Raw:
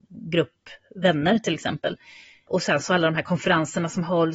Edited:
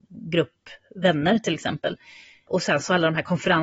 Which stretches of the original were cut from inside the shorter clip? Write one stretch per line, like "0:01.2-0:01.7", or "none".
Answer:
none